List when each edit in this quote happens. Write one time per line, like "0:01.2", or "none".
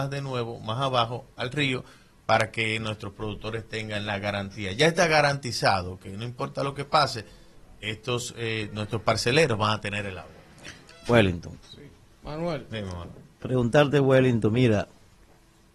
none